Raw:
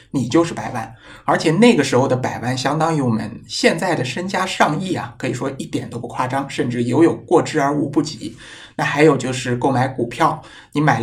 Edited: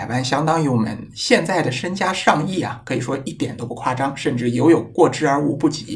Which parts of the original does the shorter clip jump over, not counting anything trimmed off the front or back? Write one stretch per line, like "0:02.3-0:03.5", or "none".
none